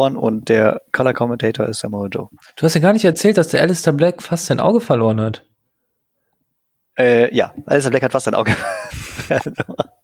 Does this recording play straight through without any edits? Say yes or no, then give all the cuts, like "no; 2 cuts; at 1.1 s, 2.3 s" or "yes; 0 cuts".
yes; 0 cuts